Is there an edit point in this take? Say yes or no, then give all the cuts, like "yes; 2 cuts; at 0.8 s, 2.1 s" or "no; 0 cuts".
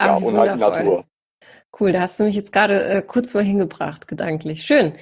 no; 0 cuts